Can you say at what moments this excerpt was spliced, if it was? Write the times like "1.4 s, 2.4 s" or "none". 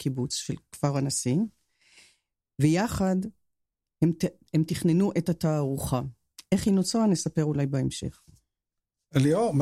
none